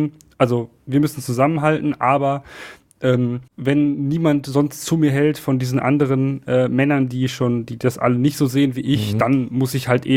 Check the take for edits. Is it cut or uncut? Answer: cut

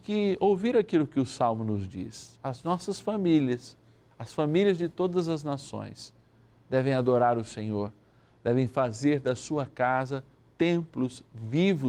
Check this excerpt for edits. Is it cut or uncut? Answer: uncut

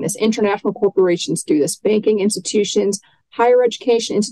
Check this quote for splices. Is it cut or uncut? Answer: uncut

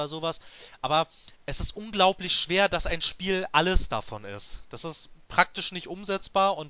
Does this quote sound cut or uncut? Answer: uncut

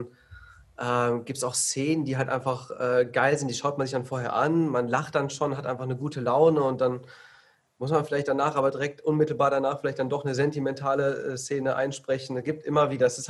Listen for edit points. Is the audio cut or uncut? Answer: uncut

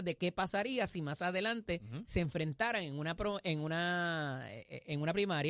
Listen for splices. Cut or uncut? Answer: uncut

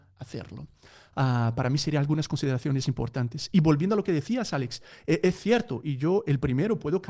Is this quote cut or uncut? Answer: uncut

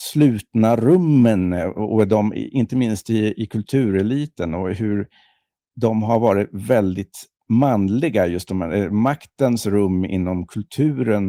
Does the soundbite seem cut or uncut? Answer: uncut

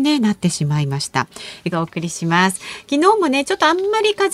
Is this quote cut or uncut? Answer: cut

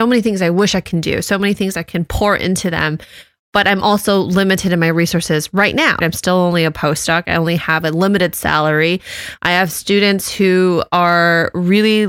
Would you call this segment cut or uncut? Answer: cut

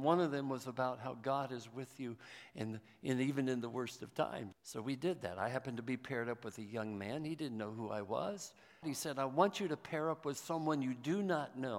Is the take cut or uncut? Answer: cut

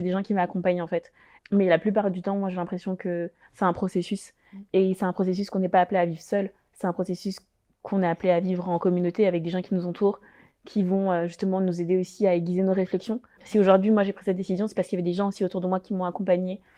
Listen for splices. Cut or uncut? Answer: cut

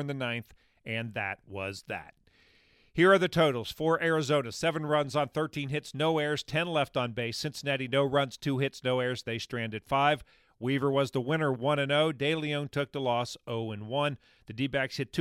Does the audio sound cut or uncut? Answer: uncut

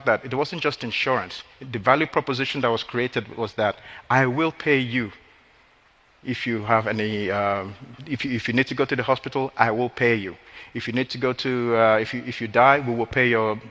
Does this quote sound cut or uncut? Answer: uncut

